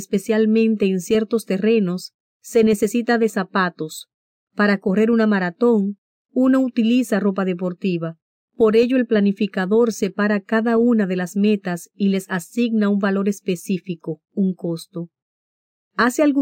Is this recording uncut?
no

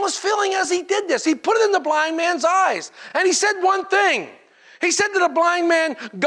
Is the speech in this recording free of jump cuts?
yes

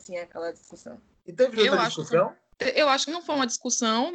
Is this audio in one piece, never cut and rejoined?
yes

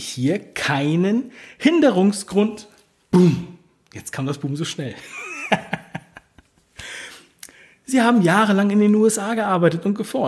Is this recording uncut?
yes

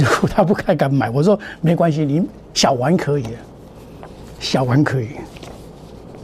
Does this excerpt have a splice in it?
no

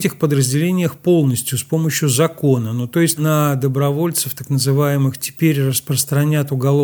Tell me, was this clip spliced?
yes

